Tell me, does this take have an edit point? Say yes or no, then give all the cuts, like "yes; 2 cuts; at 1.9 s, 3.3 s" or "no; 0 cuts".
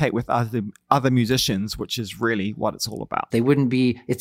yes; 1 cut; at 3.3 s